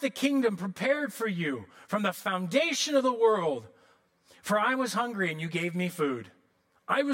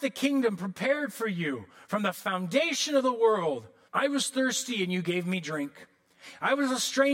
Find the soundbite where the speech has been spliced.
second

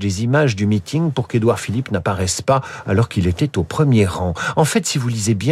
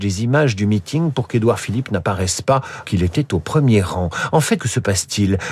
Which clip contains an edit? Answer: second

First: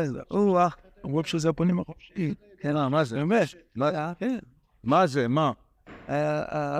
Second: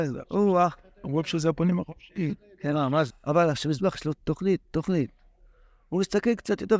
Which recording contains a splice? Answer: second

